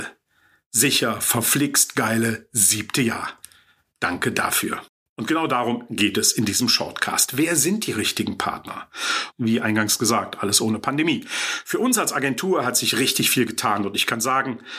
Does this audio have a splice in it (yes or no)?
yes